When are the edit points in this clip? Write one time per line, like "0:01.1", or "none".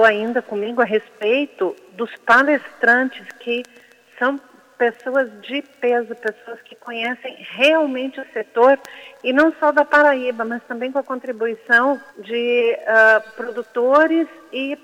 0:12.1